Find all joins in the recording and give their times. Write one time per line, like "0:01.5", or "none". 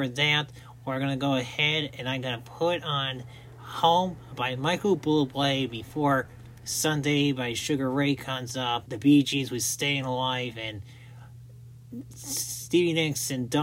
0:08.9